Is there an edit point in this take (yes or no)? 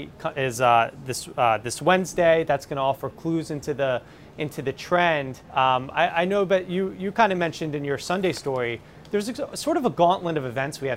yes